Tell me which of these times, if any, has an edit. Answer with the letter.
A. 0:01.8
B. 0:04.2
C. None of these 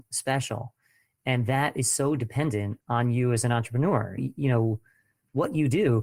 C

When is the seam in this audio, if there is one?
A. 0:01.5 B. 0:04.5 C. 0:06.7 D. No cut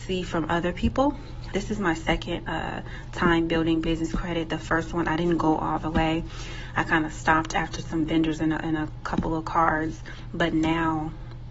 A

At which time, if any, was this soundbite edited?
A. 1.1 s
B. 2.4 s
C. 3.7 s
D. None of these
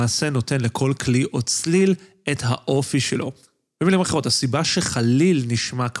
D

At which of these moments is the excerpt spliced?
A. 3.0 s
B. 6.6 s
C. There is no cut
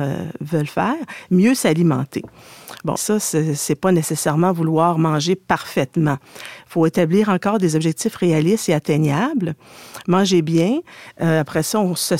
A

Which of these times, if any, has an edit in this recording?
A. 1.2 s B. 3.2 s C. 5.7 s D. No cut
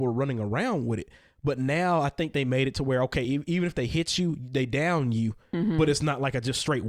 D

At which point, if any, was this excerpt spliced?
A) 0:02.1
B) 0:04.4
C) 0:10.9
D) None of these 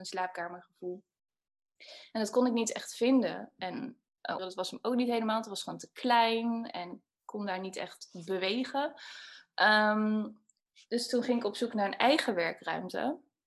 B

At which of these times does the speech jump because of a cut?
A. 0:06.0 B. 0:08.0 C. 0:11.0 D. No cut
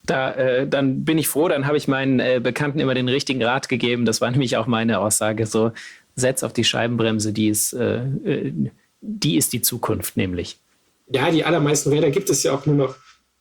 D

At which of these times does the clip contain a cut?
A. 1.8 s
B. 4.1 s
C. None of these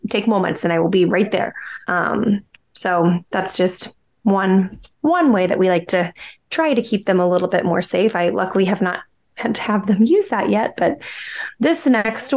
A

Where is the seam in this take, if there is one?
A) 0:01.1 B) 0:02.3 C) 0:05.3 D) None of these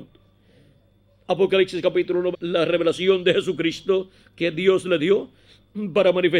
B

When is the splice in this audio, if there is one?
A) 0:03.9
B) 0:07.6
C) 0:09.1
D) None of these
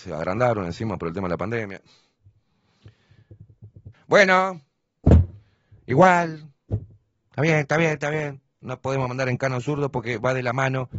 A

